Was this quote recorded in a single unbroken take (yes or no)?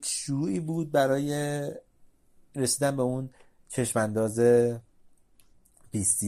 yes